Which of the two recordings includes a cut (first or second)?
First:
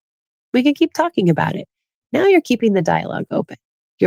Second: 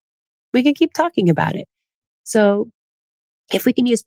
second